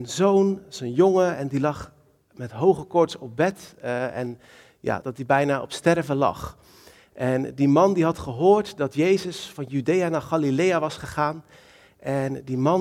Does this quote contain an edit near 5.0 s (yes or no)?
yes